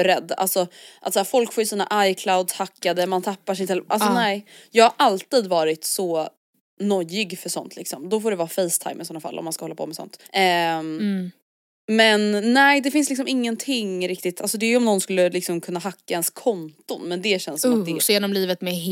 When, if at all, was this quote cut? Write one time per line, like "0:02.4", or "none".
0:10.2
0:18.0

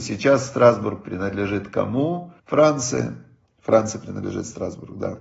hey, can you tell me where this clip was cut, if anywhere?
0:02.4

